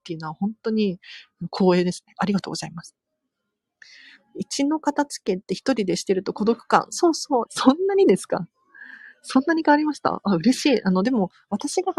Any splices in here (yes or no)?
yes